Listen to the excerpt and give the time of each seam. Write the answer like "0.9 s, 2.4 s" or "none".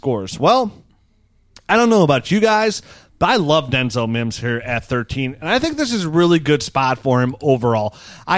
none